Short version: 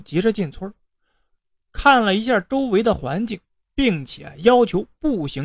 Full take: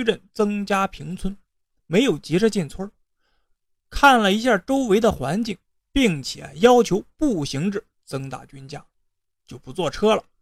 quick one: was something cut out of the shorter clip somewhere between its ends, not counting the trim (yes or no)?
no